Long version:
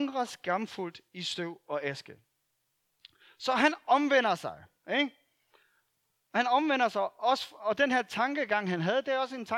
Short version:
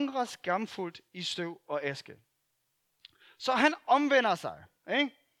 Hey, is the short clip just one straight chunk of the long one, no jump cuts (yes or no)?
yes